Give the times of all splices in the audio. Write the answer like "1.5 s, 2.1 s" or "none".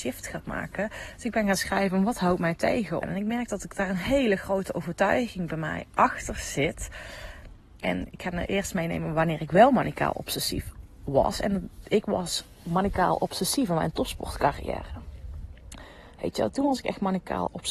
3.0 s, 16.5 s